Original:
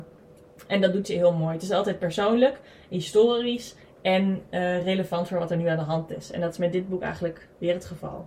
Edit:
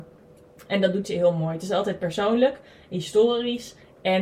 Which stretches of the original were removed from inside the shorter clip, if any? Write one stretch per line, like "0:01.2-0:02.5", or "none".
none